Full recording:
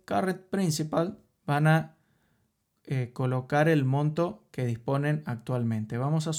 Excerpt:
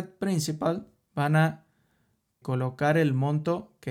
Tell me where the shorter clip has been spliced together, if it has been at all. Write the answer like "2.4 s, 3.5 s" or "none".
2.4 s